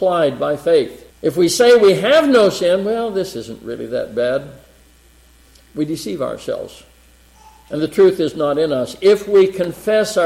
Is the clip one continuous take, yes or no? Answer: no